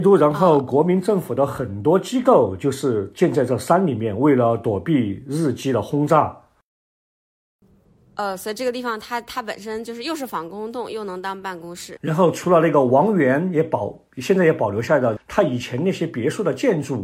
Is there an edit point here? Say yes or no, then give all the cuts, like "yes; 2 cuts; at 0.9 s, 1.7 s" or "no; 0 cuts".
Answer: yes; 2 cuts; at 12.0 s, 15.2 s